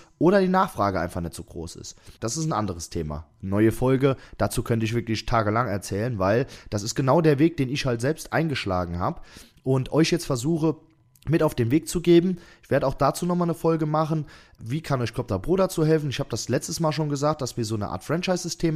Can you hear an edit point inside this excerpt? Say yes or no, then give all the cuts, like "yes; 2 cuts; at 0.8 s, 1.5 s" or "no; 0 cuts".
yes; 1 cut; at 2.2 s